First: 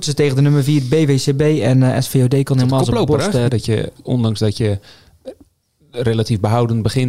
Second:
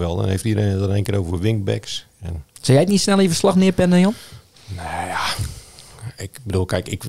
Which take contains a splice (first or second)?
first